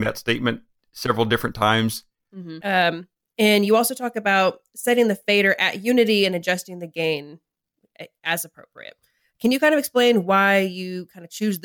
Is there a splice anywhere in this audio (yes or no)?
yes